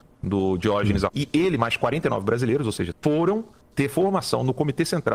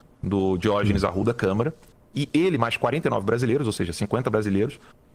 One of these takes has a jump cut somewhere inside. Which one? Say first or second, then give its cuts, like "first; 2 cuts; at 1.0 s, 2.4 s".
first; 2 cuts; at 1.1 s, 2.9 s